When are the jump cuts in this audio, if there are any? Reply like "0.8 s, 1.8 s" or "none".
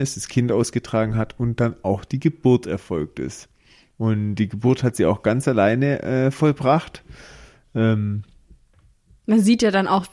none